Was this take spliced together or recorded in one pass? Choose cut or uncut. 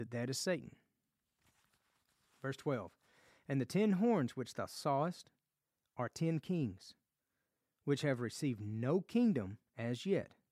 uncut